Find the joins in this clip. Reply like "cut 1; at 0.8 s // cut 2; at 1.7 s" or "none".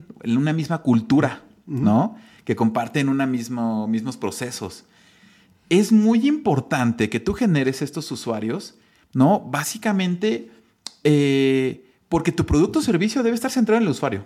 none